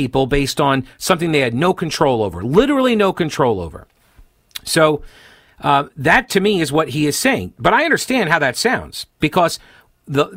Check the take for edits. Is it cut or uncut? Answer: uncut